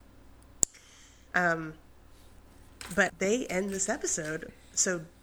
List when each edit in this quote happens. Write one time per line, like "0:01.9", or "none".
0:01.3
0:03.1